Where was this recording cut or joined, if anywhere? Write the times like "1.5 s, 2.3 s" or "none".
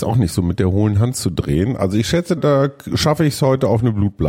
2.4 s